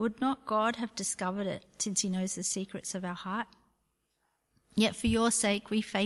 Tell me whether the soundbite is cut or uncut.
uncut